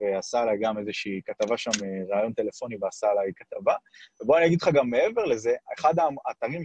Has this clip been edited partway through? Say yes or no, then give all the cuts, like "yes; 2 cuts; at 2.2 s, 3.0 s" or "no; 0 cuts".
no; 0 cuts